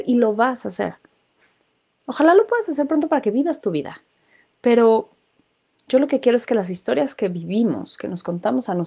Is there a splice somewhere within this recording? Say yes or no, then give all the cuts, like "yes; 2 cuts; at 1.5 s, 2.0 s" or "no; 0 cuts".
no; 0 cuts